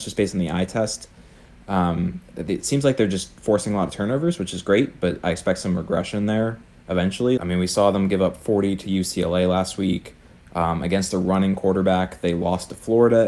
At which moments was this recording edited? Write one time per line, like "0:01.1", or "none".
0:07.4